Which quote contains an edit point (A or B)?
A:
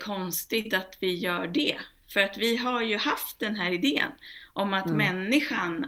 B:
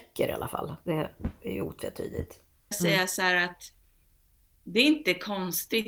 B